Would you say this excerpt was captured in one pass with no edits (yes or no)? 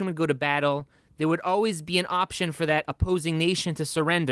yes